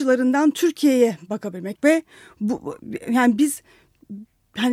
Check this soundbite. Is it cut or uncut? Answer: cut